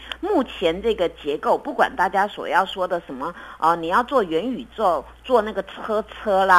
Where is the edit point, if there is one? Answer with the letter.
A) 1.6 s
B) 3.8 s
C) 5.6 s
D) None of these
D